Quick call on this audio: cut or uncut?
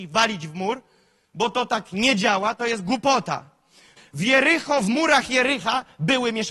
cut